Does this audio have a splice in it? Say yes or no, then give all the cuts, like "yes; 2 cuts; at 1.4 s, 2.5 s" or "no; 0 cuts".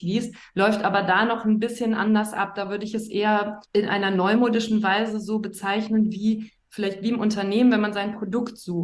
yes; 1 cut; at 3.6 s